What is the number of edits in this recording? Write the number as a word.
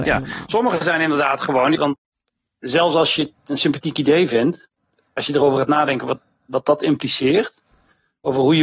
one